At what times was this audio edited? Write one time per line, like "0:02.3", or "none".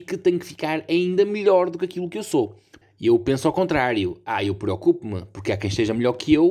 0:02.8